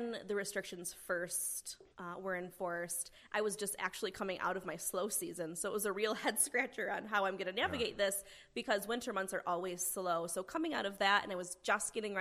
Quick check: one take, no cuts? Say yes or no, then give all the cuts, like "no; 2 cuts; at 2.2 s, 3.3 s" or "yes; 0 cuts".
no; 1 cut; at 1.9 s